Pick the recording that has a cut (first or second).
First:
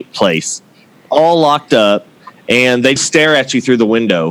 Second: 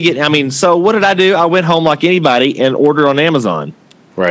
first